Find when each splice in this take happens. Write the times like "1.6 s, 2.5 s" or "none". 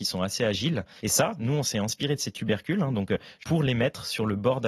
1.0 s